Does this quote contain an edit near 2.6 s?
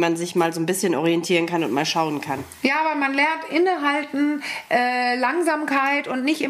no; 0 cuts

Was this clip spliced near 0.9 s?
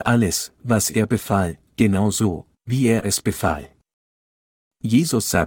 no; 0 cuts

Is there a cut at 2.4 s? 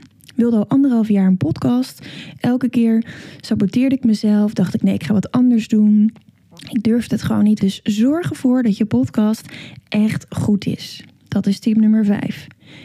yes; 2 cuts; at 2.4 s, 7.6 s

